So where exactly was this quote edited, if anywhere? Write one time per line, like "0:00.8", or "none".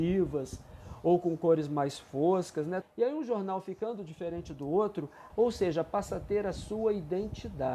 0:02.8
0:05.3